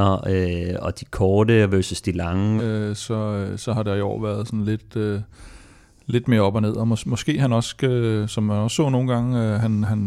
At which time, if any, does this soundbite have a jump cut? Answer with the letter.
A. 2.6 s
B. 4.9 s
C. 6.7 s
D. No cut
A